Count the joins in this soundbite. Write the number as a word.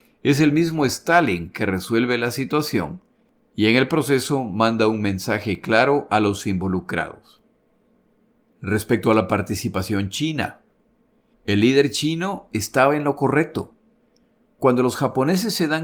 one